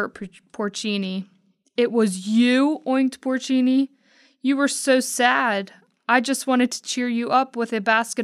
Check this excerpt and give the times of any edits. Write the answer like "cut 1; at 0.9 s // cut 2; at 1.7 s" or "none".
none